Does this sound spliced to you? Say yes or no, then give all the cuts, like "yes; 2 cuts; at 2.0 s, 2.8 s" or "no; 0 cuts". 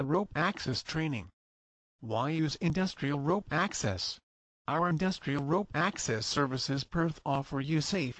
yes; 1 cut; at 4.5 s